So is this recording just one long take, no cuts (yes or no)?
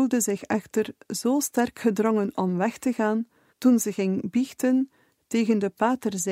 no